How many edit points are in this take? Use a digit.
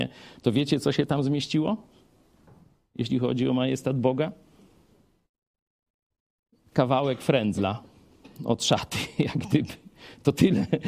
0